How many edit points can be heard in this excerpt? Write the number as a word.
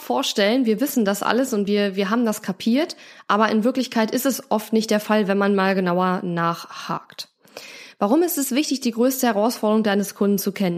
zero